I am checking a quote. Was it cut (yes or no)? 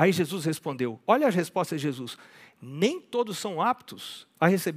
no